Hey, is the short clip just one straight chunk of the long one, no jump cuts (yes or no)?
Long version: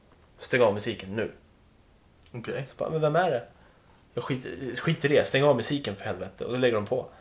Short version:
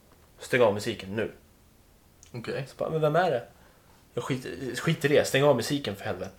yes